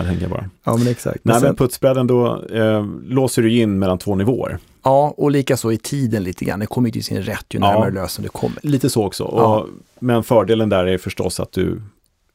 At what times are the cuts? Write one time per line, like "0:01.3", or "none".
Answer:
0:08.6